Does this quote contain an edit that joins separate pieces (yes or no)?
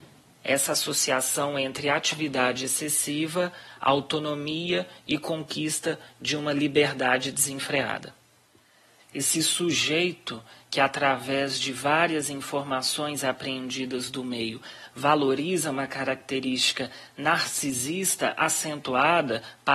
yes